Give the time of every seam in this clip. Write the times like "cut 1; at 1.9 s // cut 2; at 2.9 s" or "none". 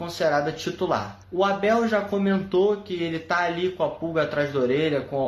cut 1; at 1.2 s